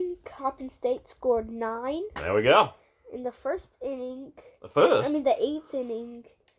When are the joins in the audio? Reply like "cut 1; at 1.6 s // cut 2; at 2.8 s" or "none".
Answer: none